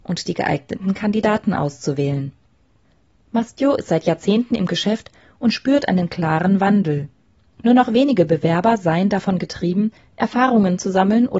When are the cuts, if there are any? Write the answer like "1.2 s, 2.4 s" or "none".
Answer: none